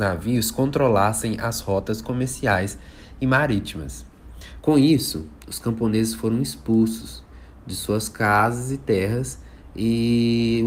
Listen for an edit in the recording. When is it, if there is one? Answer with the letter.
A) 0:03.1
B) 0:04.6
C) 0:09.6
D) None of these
B